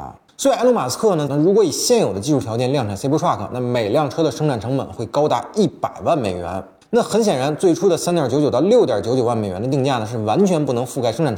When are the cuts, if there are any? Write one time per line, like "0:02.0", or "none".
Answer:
0:01.3